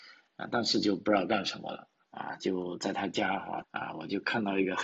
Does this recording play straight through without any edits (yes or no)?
no